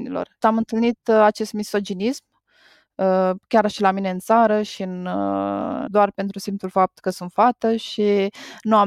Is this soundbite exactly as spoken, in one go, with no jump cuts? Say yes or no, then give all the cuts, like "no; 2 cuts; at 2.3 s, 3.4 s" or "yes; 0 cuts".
no; 1 cut; at 5.9 s